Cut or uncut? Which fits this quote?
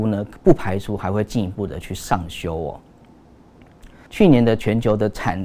cut